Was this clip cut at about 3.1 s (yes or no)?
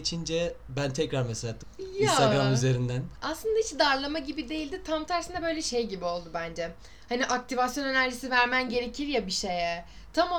yes